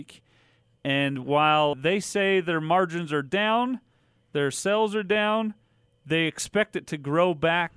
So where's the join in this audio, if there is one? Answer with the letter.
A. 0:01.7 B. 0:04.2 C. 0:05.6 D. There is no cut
A